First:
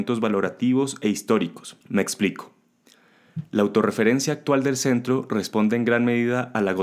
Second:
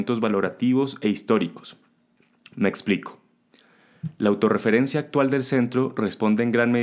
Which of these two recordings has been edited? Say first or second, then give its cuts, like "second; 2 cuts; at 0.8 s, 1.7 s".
first; 1 cut; at 1.8 s